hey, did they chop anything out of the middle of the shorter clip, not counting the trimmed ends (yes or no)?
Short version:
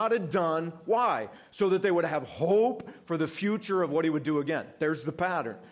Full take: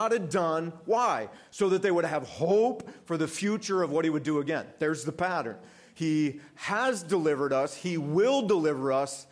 no